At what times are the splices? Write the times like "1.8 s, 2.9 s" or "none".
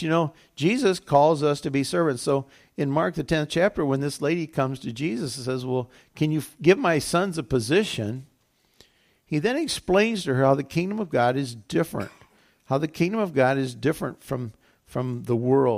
none